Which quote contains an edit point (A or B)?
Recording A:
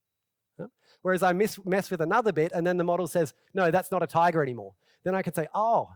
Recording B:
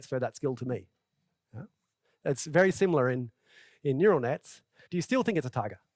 B